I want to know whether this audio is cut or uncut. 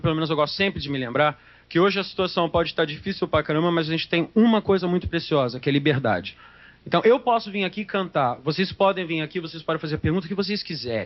uncut